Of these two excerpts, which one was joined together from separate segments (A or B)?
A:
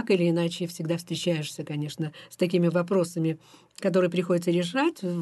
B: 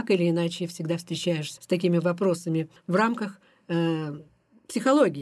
B